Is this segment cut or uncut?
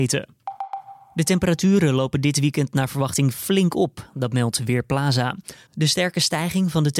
cut